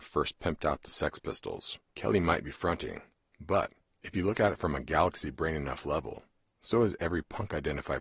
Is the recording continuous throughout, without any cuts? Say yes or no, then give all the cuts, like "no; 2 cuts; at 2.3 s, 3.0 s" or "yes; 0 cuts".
no; 1 cut; at 1.9 s